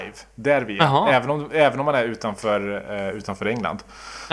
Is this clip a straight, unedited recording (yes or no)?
yes